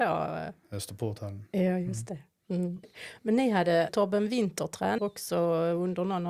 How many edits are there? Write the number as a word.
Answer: two